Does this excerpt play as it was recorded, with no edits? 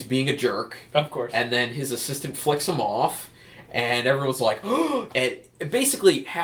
no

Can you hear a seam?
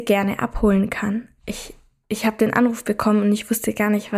no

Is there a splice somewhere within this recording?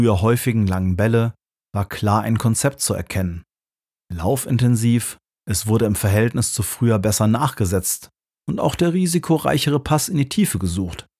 yes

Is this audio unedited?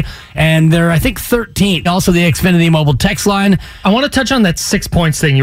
no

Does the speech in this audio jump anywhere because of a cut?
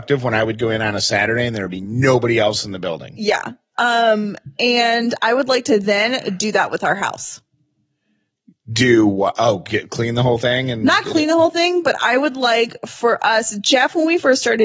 no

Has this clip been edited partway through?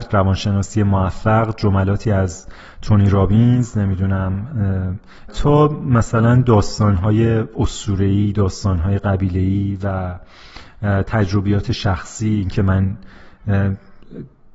yes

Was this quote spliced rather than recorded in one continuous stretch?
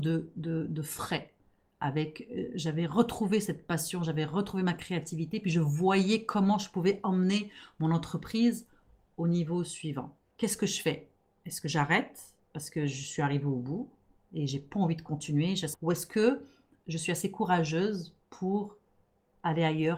yes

